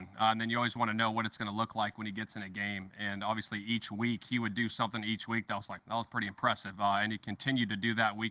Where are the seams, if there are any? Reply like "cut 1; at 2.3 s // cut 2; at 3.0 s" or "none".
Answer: cut 1; at 5.8 s